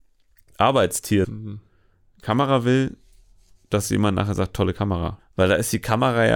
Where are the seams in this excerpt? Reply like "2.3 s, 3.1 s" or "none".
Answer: 1.2 s, 5.2 s